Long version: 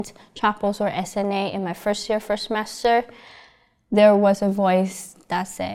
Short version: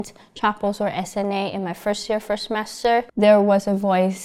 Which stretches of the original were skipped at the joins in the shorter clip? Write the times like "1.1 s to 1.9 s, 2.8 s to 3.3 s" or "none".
3.1 s to 3.8 s